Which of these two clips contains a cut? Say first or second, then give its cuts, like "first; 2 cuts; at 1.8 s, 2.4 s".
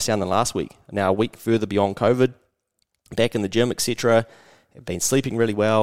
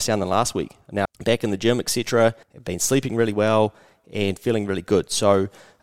second; 2 cuts; at 1.1 s, 2.4 s